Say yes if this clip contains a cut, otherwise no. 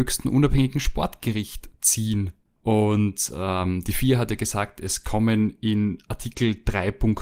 yes